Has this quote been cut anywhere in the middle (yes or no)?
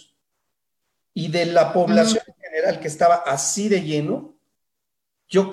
no